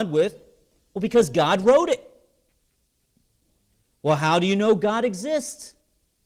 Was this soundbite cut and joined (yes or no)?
no